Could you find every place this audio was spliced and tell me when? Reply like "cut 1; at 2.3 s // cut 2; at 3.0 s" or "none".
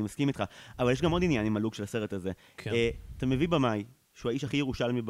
none